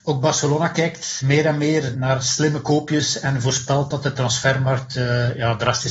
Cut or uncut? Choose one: uncut